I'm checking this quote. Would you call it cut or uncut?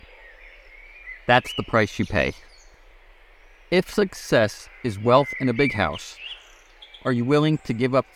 uncut